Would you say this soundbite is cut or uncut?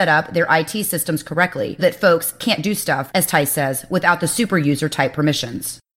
cut